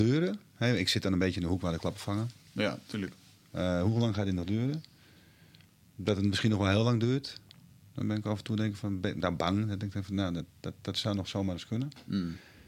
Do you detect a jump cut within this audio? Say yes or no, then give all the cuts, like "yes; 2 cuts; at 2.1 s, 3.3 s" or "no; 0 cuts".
no; 0 cuts